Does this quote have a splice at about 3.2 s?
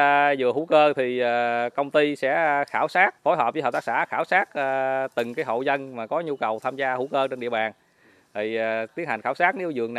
yes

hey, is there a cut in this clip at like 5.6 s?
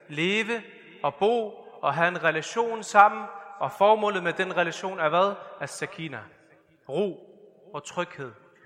no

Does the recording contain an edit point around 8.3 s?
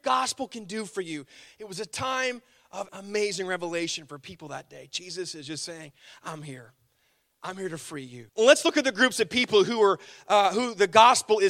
yes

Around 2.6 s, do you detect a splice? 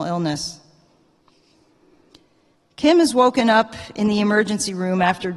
no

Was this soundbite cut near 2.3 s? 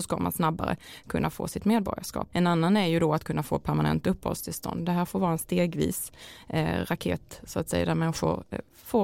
yes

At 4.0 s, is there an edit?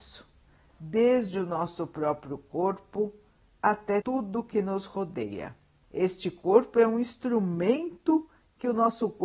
yes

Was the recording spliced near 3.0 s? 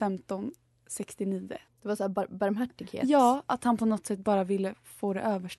no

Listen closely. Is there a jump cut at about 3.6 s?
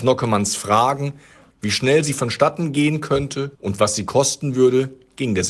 yes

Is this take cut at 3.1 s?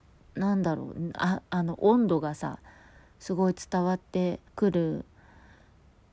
no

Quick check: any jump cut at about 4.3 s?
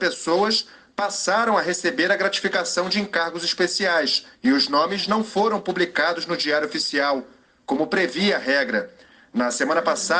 yes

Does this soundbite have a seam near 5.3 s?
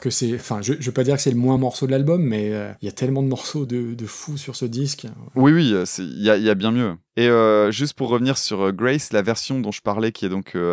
no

